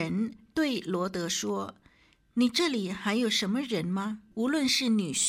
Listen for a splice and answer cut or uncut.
cut